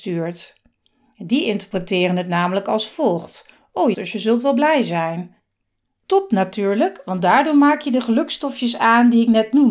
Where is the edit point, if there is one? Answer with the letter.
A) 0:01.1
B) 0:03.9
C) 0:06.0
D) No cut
B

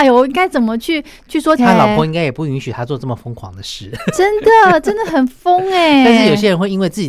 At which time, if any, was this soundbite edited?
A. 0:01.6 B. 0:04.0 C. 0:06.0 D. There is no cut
A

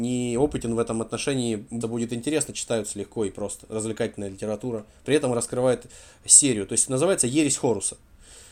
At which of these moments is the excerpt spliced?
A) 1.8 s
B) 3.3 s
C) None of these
A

